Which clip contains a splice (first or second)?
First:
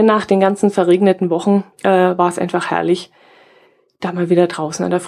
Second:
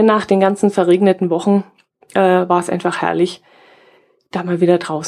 first